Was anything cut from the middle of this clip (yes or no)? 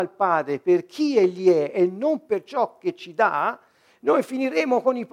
no